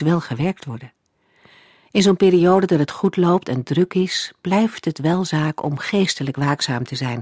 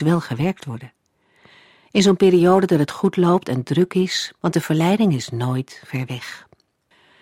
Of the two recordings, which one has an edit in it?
second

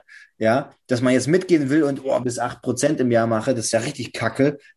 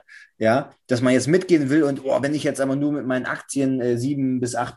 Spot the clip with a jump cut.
first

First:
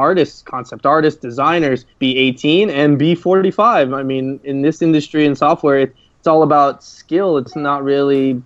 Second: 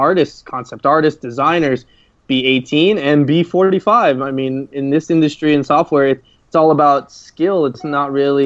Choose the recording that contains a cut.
first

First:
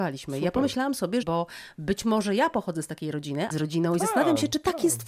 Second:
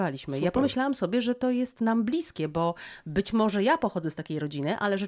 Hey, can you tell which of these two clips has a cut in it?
first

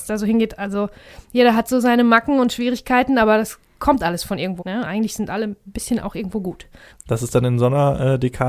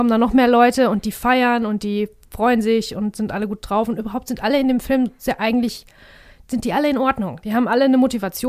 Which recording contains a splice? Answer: first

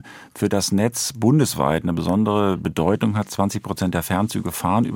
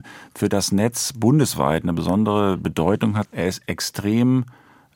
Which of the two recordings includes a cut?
second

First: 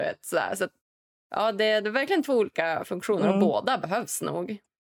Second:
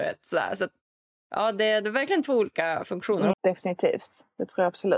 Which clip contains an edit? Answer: second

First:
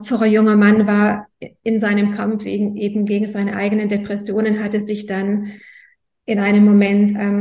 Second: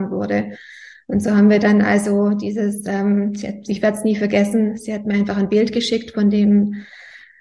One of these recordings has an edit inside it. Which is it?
second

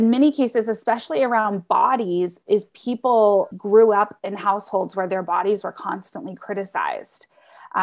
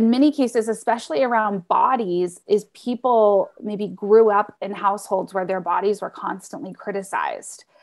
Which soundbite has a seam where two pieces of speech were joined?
first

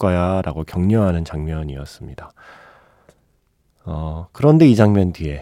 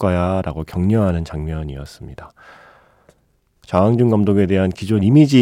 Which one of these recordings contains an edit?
second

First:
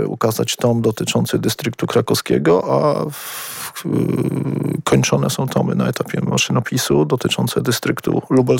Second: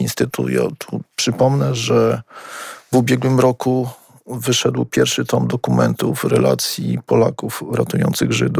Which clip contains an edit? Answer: second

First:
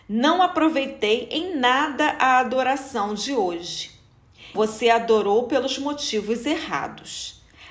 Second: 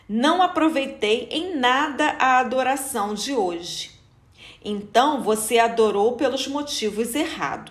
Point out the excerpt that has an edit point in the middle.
first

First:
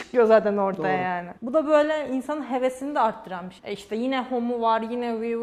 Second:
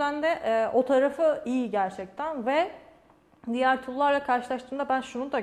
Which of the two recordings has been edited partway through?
first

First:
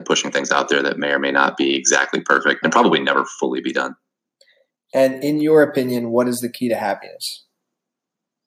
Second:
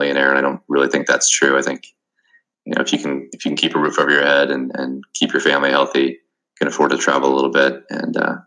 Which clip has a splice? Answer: first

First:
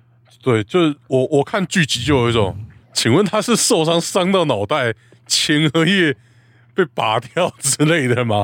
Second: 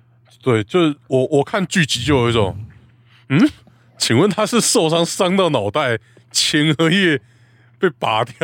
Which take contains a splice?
first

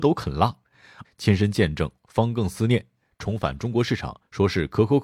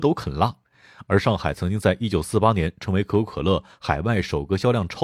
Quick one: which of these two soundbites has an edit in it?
first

